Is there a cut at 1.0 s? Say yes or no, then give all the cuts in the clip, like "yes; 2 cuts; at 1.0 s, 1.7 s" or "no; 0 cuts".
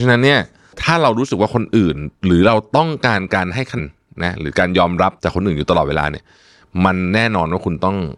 no; 2 cuts; at 3.8 s, 5.2 s